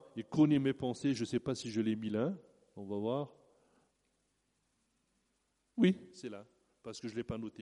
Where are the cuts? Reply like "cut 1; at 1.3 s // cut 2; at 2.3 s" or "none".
none